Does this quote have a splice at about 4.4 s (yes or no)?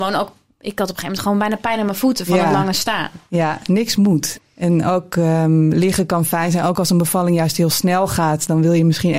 yes